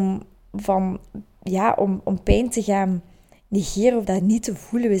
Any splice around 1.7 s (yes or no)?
no